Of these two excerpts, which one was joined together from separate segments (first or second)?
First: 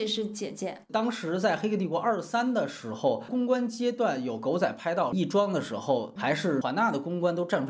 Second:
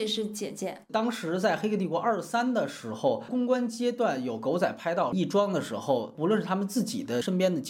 first